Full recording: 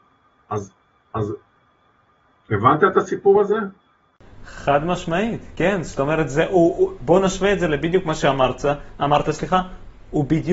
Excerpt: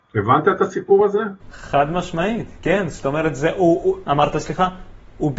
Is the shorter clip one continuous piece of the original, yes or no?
no